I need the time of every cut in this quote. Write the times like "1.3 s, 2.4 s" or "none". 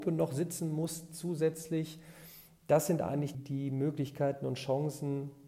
3.3 s